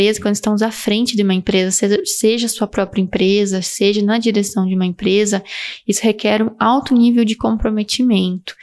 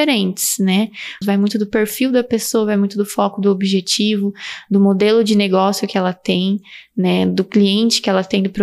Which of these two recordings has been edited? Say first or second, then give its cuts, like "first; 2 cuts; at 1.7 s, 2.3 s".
second; 1 cut; at 1.2 s